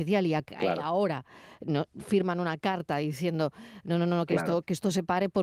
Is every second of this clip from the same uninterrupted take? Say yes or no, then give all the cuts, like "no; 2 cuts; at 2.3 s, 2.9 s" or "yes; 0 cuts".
yes; 0 cuts